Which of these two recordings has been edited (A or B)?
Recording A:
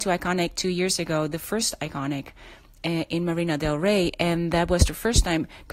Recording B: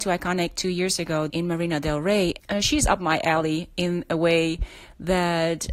B